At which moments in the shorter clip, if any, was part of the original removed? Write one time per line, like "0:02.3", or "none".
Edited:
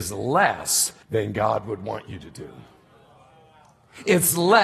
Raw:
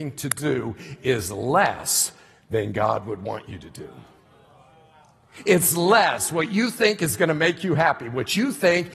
0:01.0